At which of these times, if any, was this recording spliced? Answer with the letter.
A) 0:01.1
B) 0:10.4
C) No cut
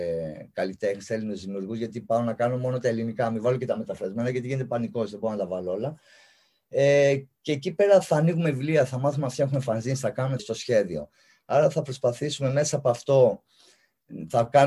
B